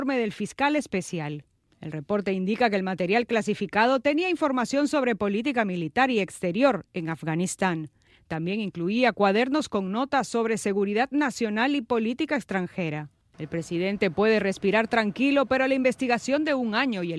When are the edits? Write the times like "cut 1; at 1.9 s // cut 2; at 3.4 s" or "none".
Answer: cut 1; at 13.3 s